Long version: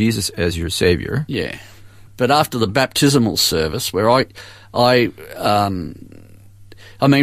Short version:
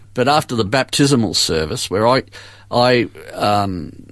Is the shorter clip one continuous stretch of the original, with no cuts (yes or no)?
yes